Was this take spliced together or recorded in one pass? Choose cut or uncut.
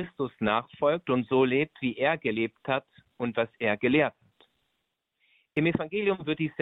uncut